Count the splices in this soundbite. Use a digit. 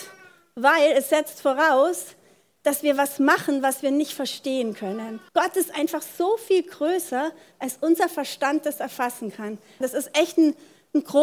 2